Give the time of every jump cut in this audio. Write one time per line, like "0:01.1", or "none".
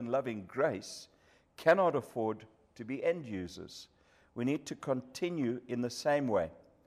none